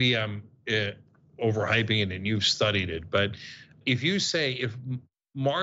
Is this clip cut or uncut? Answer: cut